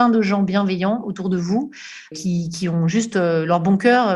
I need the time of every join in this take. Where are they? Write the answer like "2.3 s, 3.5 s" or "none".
2.1 s

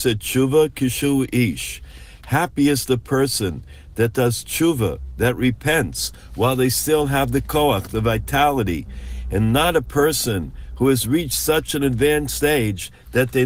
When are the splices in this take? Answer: none

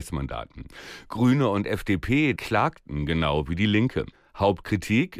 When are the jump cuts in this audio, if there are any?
2.4 s

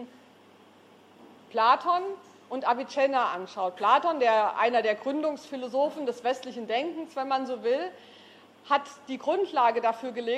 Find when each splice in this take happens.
none

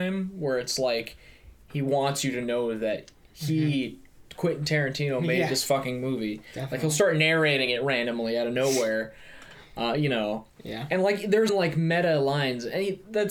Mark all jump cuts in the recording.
11.5 s

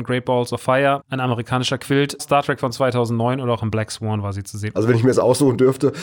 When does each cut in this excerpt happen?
1.0 s, 2.2 s, 4.7 s

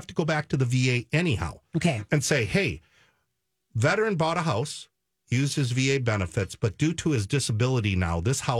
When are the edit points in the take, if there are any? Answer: none

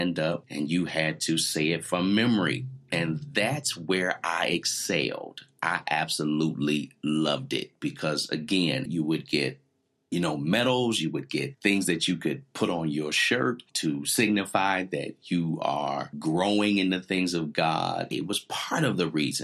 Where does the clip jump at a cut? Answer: 8.9 s, 18.1 s

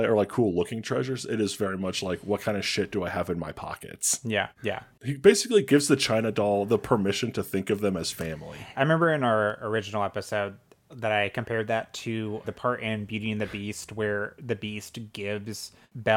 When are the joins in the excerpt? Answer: 4.6 s, 8.7 s, 12.4 s

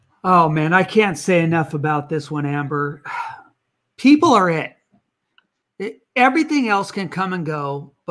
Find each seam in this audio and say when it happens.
none

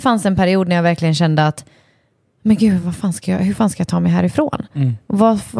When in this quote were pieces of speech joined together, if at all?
none

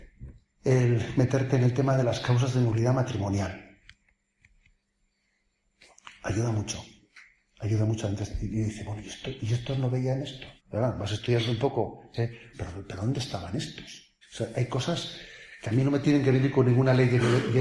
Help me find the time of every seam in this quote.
10.6 s, 12.5 s, 14.2 s

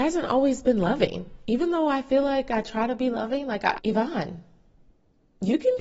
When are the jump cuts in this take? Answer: 3.8 s

